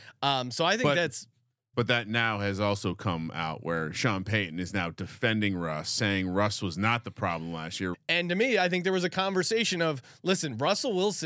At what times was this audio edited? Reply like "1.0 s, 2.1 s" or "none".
7.9 s